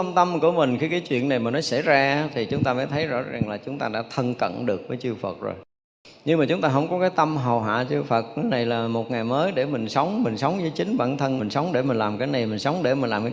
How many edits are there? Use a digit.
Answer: 1